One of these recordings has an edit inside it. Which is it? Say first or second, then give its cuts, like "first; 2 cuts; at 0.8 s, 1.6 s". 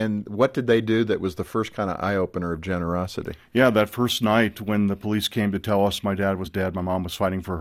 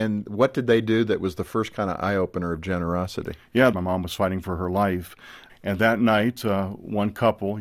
second; 2 cuts; at 3.7 s, 5.5 s